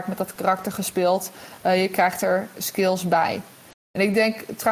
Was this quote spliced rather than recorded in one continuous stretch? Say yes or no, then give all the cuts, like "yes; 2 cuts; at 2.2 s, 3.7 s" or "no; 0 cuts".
no; 0 cuts